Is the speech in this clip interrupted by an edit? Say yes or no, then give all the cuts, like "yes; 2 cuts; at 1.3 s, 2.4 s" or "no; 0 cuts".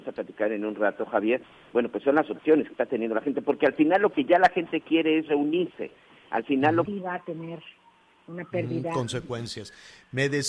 yes; 1 cut; at 6.9 s